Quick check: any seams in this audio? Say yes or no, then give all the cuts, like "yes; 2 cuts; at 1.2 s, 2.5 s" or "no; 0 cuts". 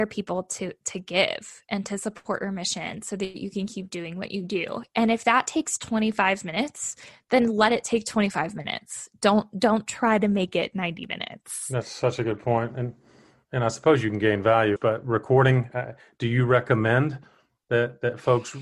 yes; 1 cut; at 14.8 s